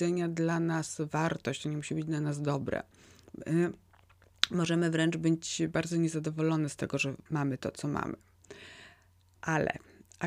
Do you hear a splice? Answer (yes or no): yes